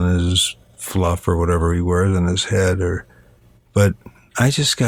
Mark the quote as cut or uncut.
uncut